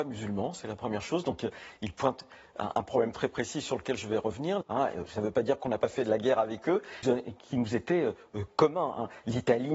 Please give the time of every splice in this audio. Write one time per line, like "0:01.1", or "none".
0:04.6
0:07.0